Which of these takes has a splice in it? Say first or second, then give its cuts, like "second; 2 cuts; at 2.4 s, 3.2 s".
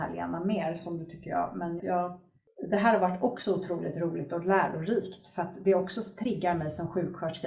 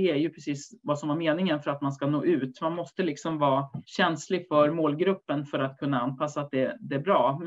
first; 1 cut; at 1.8 s